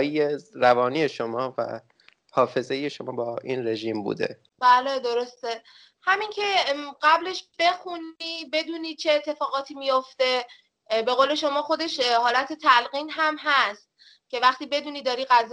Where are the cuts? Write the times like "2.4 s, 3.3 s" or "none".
4.5 s